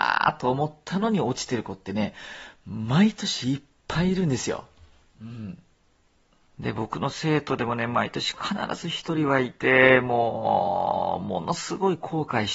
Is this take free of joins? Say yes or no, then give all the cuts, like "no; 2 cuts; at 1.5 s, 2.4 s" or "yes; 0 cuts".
yes; 0 cuts